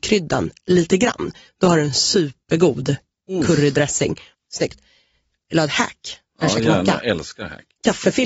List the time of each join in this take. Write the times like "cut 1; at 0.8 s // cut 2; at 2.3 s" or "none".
cut 1; at 1.5 s // cut 2; at 4.3 s